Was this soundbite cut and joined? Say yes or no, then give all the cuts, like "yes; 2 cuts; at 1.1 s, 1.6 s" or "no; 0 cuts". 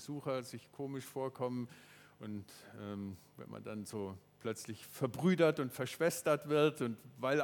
no; 0 cuts